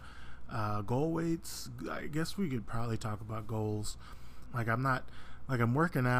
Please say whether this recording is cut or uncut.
cut